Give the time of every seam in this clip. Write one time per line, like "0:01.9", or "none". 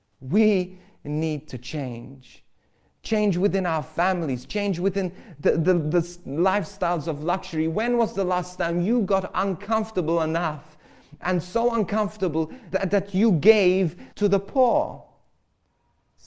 0:12.7
0:14.1